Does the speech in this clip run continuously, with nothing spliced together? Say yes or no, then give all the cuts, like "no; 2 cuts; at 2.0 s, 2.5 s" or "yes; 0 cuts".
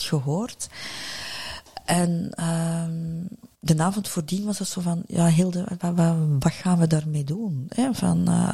no; 1 cut; at 3.5 s